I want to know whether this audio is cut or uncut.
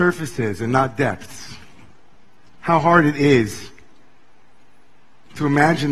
cut